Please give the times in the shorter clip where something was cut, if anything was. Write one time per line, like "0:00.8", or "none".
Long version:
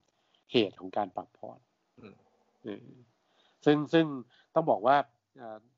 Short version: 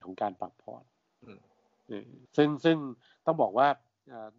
0:02.3